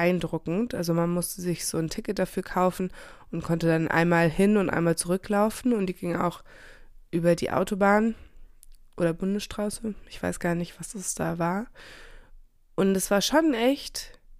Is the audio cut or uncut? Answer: uncut